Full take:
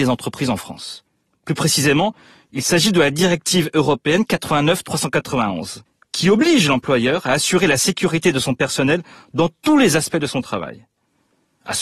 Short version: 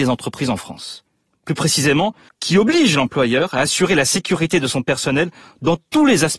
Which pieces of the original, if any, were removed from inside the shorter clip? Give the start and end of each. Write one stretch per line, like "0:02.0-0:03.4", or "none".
0:02.3-0:06.0